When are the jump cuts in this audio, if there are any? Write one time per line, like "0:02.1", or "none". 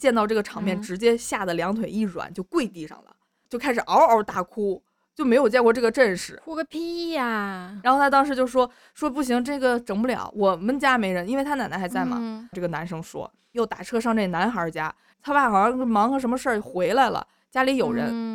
0:12.5
0:15.1